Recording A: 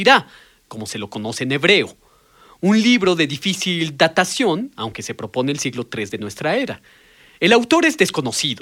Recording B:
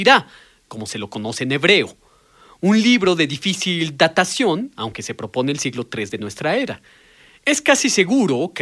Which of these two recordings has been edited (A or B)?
B